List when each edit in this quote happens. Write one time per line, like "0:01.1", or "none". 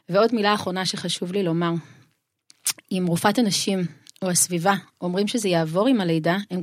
none